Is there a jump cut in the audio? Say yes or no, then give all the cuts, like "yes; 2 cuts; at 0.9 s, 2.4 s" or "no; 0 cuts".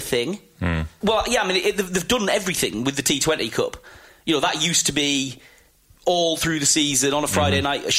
yes; 1 cut; at 1.0 s